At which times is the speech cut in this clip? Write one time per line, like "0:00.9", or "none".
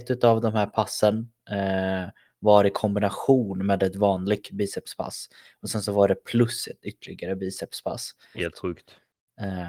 0:08.3

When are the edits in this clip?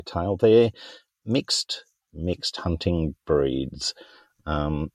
0:02.0

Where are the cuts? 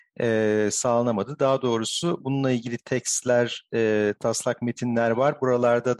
none

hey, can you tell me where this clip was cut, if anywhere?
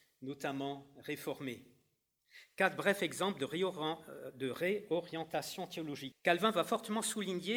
0:06.1

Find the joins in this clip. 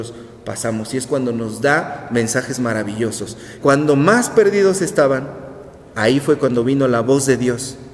0:03.6
0:05.9

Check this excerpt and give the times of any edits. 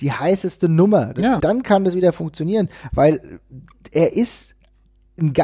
0:01.4

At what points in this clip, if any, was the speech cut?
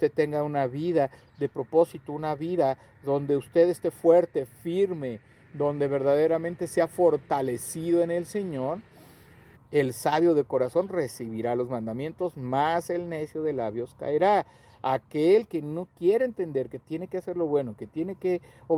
0:09.5

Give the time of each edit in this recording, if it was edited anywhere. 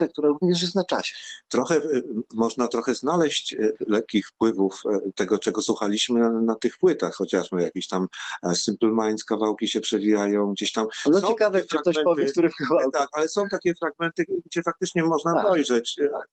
none

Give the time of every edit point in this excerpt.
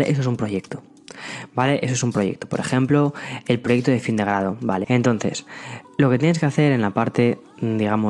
0:04.8

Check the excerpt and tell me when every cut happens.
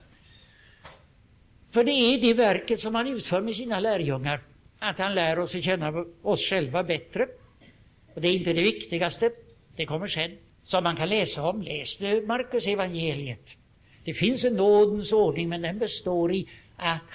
0:10.5
0:13.9

